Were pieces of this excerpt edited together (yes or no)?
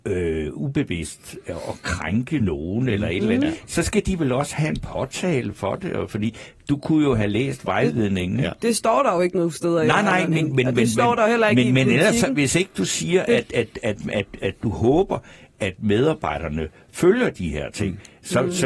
no